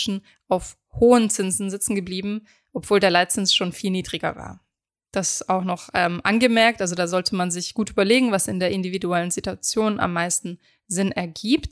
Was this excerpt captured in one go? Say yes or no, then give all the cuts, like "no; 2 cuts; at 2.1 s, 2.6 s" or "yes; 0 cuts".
yes; 0 cuts